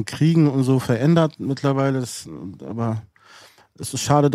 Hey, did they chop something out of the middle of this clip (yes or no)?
no